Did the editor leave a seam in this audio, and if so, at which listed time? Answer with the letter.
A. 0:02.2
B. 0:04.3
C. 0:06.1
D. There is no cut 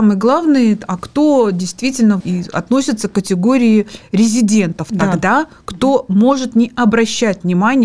A